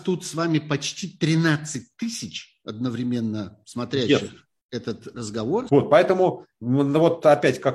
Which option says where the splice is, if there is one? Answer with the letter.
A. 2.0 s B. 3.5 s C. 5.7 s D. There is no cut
C